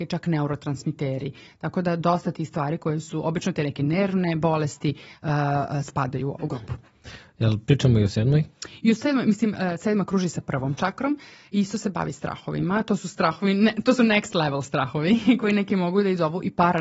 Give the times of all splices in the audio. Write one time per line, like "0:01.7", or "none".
none